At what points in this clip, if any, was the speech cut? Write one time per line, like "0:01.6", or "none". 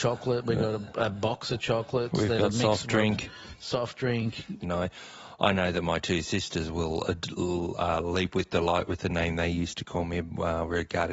0:04.6